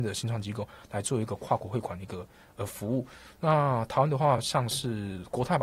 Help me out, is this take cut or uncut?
uncut